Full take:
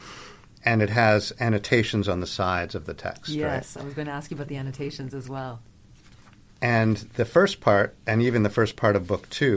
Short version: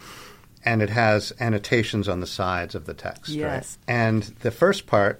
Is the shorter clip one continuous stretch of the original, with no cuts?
no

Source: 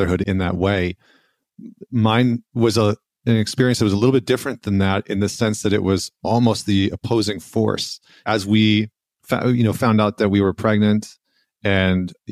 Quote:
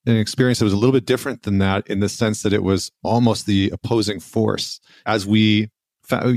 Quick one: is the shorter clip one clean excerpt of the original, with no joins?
yes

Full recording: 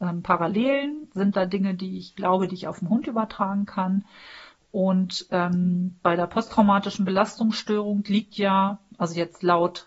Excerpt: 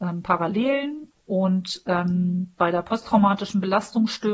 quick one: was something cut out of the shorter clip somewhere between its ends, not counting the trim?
yes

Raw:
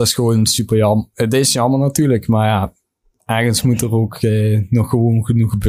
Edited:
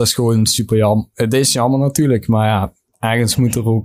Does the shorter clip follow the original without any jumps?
no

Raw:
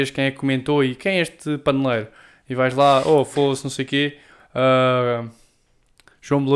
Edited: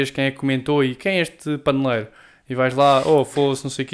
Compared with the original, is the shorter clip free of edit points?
yes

